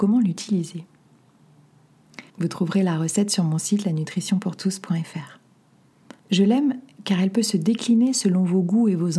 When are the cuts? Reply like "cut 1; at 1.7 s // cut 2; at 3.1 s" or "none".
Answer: cut 1; at 2.3 s // cut 2; at 6.2 s